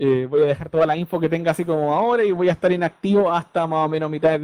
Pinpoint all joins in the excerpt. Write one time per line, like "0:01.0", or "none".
none